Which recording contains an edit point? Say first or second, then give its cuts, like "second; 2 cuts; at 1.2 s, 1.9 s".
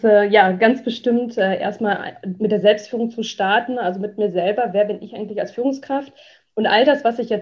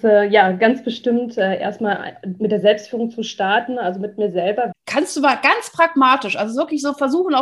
second; 1 cut; at 4.7 s